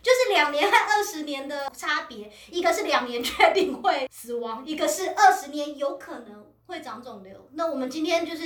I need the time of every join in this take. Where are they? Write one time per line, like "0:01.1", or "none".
none